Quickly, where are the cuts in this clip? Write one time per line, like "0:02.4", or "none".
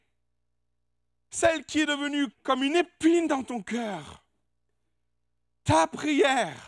0:02.3

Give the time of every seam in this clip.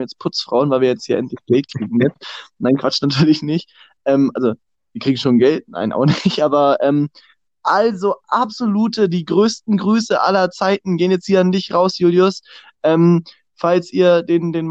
none

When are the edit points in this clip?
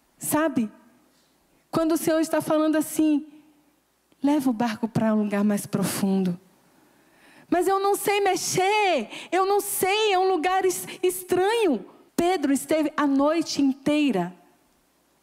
0:12.1

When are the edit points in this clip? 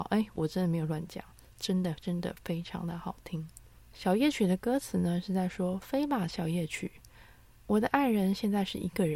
none

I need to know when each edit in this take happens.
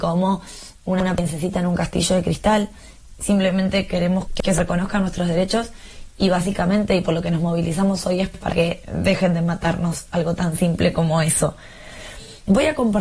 0:04.3

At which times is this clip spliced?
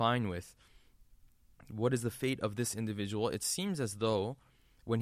none

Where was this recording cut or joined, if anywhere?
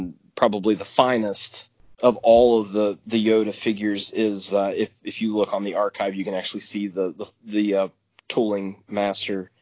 none

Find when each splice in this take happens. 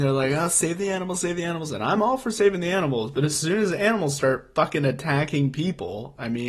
none

